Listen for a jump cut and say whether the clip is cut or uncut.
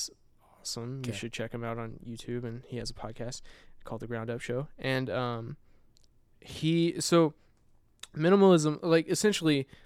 uncut